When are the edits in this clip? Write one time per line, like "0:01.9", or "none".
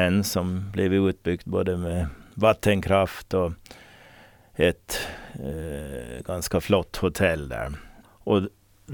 0:08.0

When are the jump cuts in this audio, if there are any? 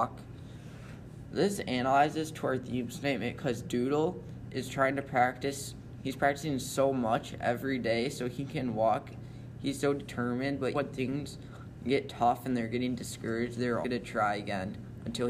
0:10.7
0:13.8

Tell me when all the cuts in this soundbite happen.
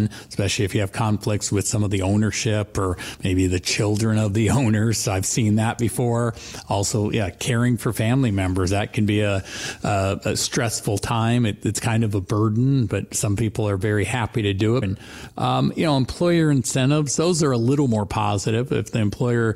0:14.8

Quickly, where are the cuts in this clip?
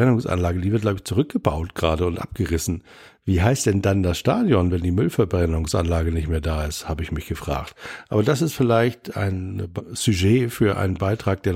none

